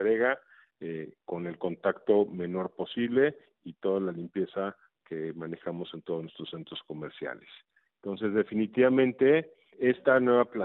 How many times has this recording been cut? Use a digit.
1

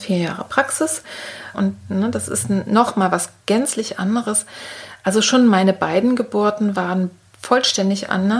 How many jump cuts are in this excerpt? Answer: 1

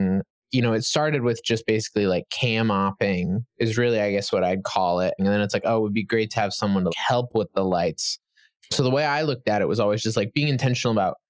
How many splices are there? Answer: 3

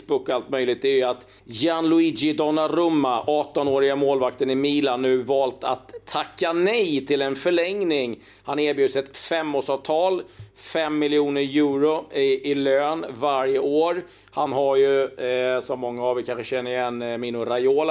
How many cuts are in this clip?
1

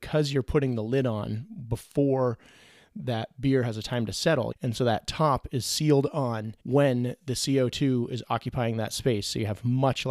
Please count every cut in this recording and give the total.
2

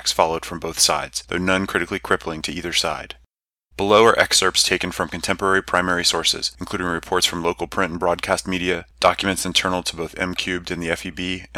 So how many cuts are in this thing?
1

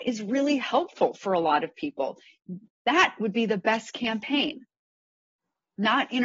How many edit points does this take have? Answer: 1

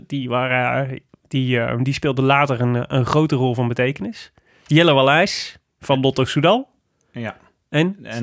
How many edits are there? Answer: 0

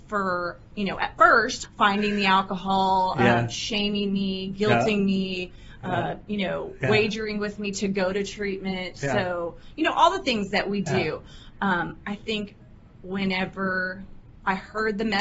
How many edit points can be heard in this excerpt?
1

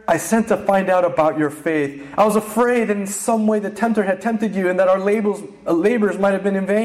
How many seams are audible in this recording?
0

